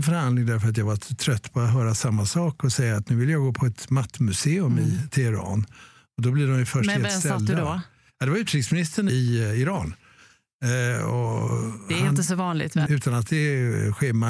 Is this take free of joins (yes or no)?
no